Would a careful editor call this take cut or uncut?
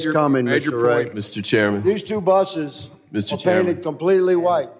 cut